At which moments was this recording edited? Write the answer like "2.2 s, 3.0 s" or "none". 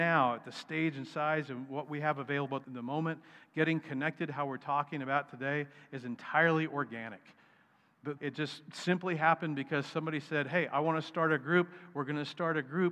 2.6 s, 8.2 s